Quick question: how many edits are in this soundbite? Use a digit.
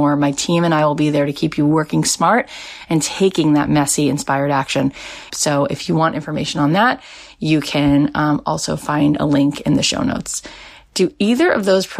1